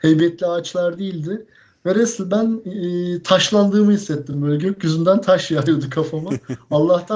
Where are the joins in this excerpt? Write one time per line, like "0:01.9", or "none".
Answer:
none